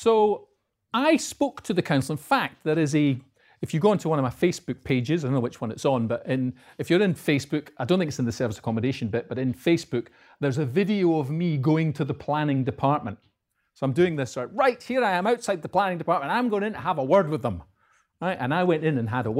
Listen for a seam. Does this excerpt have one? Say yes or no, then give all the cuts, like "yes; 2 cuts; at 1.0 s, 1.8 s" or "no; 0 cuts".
no; 0 cuts